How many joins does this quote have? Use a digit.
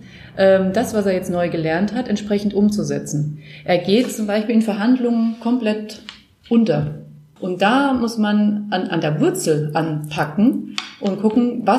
1